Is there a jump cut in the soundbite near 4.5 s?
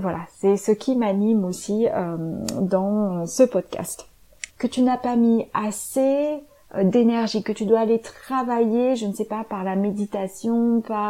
yes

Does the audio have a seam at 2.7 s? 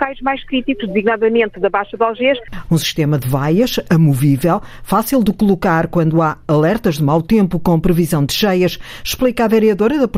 yes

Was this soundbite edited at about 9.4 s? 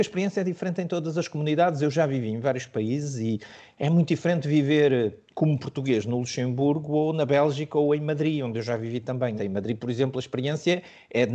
yes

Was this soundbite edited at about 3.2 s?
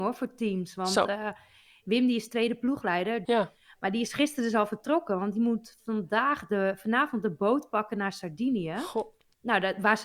yes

